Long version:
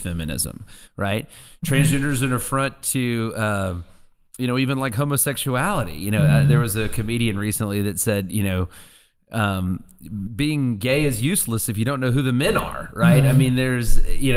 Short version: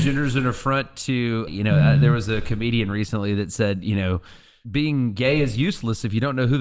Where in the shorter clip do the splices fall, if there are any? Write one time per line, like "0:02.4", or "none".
0:01.5
0:04.6